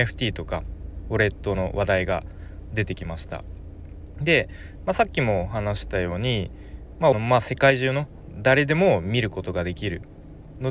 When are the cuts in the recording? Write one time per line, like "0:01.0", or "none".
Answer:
0:07.1